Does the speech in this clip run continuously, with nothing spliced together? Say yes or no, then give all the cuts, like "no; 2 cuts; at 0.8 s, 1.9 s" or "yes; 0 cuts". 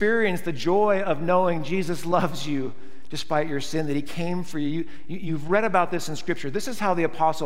yes; 0 cuts